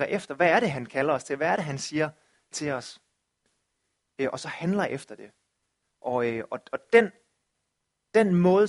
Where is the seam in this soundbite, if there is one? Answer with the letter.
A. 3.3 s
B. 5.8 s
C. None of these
B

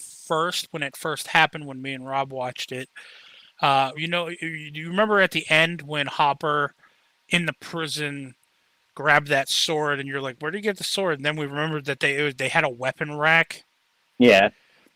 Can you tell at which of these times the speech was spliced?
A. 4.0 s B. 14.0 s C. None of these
A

